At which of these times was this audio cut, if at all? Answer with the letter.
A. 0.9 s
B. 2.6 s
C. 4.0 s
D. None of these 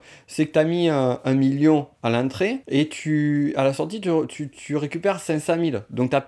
B